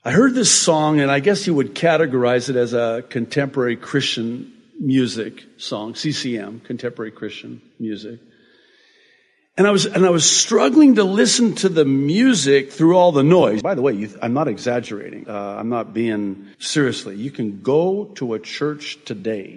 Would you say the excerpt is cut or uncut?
cut